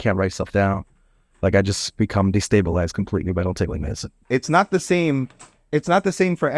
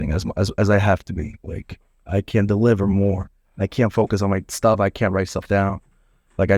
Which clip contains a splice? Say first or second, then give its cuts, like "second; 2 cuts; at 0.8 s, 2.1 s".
first; 1 cut; at 4.2 s